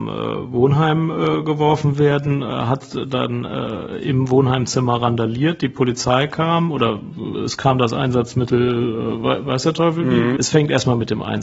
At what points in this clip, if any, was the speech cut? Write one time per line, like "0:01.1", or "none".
0:10.4